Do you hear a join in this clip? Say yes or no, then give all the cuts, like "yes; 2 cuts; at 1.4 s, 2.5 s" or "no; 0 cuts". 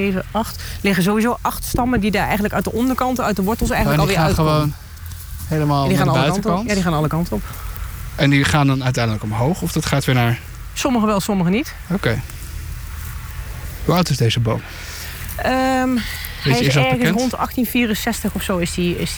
no; 0 cuts